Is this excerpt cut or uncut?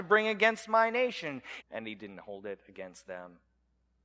cut